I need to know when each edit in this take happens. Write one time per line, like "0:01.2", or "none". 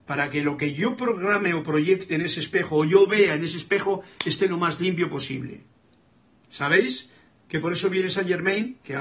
none